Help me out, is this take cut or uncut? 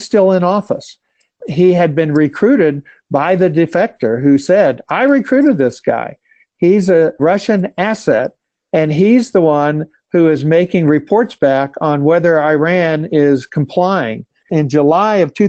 uncut